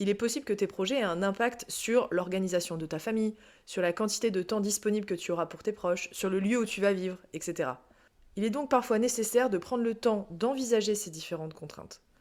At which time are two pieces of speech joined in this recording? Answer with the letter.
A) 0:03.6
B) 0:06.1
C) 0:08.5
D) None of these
D